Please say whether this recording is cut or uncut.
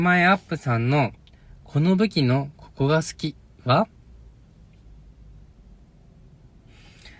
uncut